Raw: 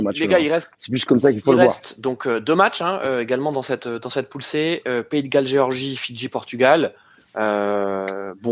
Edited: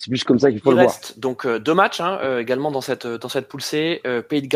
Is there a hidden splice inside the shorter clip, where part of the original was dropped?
no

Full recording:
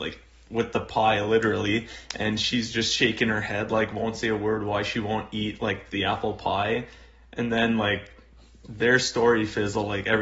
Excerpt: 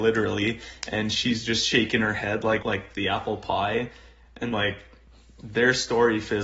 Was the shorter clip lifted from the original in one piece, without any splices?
no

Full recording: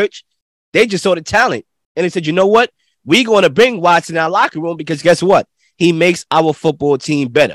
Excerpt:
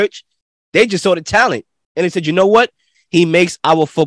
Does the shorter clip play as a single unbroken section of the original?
no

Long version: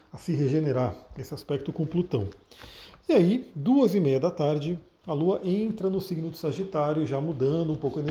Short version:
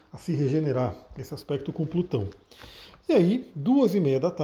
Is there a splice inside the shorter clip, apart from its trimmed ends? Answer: no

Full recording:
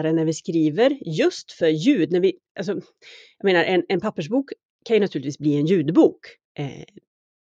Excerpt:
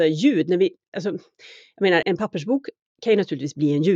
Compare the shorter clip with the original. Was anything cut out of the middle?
yes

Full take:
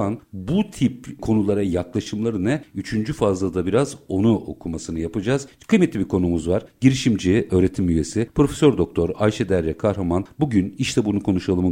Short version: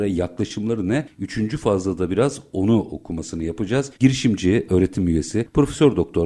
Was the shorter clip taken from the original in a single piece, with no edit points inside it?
no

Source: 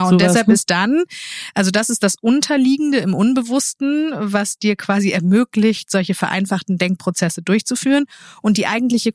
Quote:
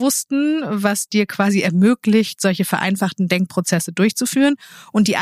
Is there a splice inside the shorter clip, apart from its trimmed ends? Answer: no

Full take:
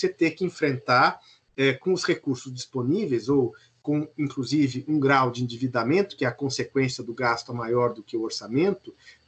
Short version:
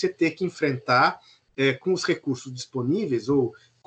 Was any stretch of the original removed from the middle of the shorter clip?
no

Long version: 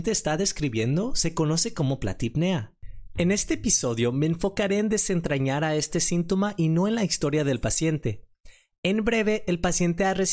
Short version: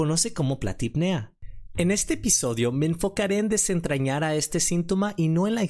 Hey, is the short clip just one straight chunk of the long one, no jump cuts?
yes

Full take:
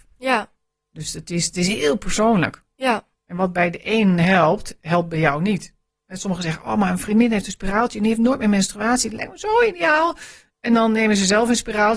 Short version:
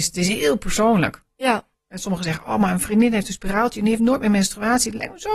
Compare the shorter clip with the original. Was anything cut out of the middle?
yes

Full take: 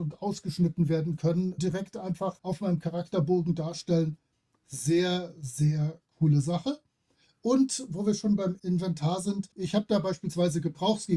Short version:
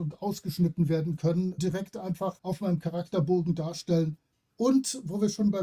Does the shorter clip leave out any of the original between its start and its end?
yes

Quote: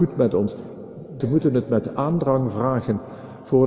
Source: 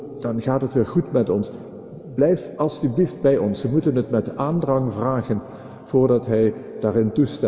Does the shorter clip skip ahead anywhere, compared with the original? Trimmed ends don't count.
yes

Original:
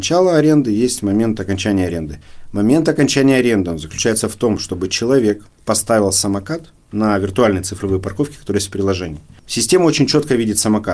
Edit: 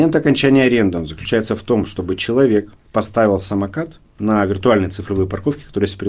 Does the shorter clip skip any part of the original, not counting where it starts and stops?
no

